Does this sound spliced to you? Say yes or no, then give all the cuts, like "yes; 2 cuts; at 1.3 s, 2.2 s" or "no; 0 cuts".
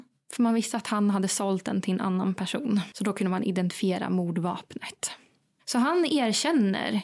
yes; 1 cut; at 2.9 s